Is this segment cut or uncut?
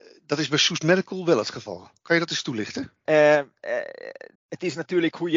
cut